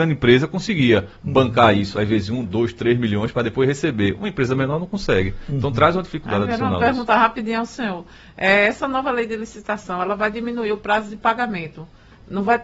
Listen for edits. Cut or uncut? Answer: uncut